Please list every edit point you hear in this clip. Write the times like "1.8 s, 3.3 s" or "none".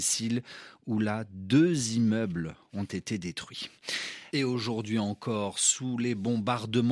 4.3 s